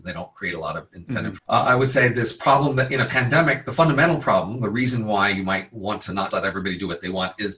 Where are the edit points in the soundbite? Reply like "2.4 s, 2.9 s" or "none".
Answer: 1.4 s, 6.3 s